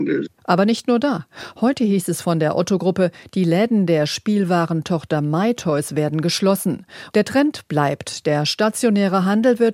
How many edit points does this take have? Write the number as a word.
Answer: one